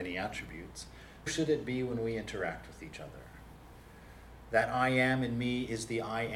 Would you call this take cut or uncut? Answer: cut